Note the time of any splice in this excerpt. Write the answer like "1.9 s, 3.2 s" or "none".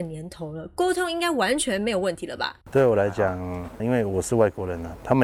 2.6 s, 3.8 s